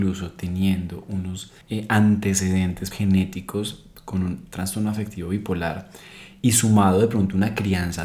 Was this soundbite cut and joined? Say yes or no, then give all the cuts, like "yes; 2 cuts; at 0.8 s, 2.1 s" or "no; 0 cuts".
yes; 2 cuts; at 1.6 s, 2.9 s